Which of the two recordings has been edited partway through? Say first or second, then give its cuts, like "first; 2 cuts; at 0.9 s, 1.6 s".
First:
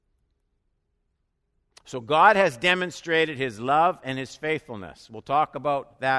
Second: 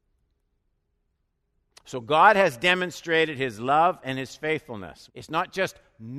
second; 1 cut; at 5.1 s